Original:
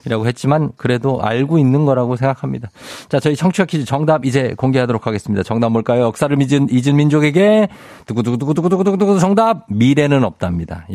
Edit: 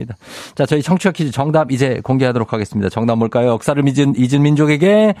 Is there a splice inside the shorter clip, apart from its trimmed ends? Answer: no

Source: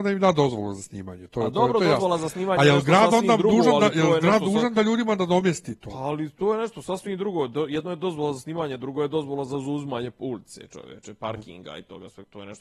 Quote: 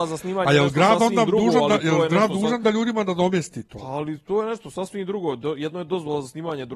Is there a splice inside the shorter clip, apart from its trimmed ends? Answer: no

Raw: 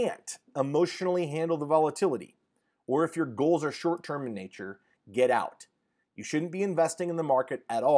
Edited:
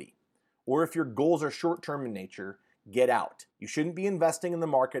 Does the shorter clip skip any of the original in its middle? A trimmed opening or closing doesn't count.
yes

